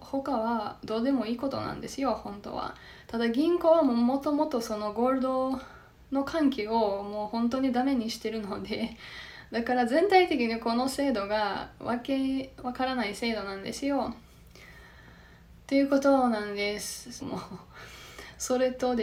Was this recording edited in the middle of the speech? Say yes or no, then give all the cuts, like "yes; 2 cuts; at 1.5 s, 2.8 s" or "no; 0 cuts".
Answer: yes; 1 cut; at 17.2 s